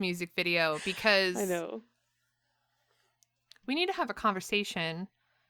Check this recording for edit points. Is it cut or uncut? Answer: uncut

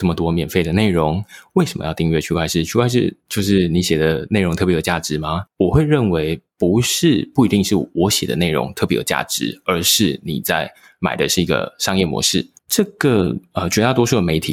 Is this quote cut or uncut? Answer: cut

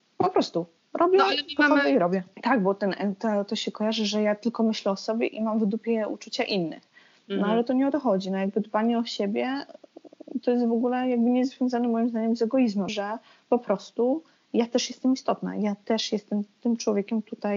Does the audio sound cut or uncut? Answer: cut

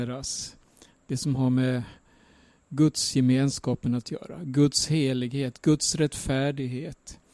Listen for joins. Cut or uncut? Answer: uncut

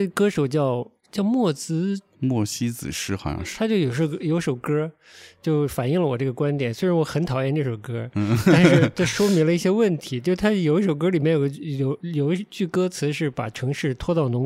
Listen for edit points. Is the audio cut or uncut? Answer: uncut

